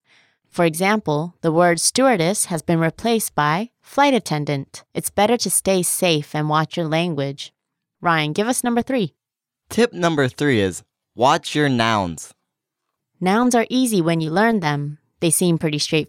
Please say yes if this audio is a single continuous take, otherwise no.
no